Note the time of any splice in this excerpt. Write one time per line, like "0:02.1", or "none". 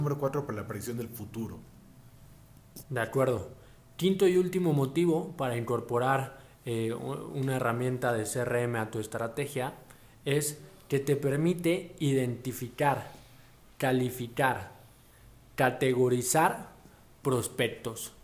none